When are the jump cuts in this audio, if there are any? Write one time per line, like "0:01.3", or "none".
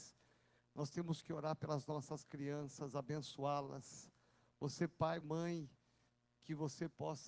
0:05.2